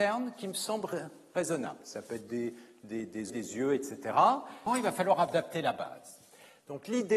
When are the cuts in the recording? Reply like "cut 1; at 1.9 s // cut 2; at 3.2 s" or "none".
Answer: cut 1; at 3.3 s // cut 2; at 4.7 s

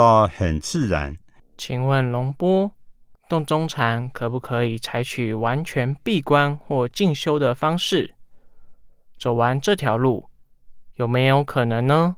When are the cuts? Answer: cut 1; at 1.4 s // cut 2; at 3.1 s

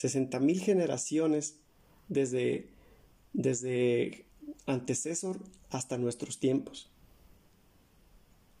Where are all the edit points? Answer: none

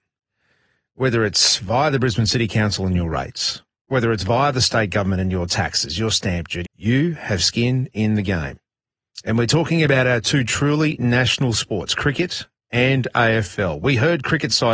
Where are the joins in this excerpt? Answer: cut 1; at 6.6 s

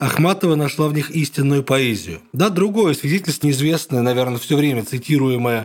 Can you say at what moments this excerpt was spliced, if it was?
cut 1; at 3.4 s

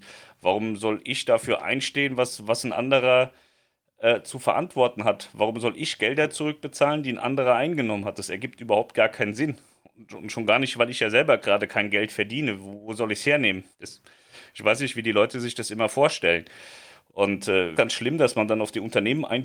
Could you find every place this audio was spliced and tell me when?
cut 1; at 13.7 s // cut 2; at 17.8 s

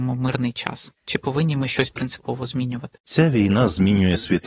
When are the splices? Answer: cut 1; at 1.0 s // cut 2; at 3.0 s

